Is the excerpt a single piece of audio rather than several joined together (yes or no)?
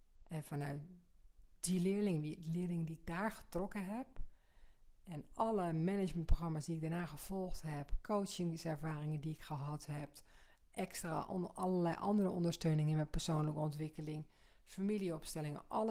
yes